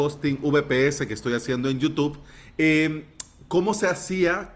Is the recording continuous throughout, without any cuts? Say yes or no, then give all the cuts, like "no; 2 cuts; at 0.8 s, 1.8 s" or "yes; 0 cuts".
yes; 0 cuts